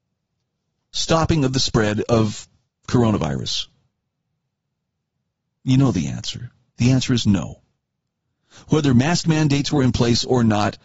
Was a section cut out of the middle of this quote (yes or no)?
no